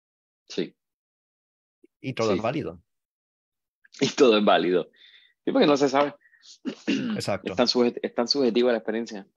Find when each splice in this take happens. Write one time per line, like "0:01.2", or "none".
none